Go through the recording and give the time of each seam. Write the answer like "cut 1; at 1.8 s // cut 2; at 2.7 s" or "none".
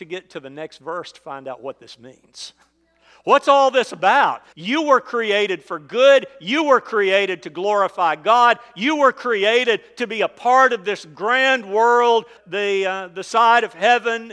cut 1; at 4.5 s // cut 2; at 12.4 s